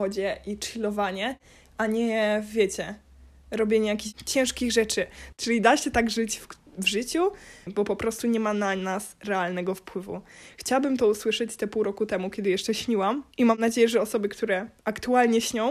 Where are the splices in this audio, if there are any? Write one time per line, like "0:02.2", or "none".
0:05.3
0:07.7
0:13.3